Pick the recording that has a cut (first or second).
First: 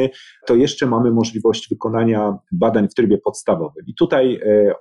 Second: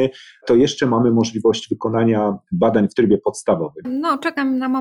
second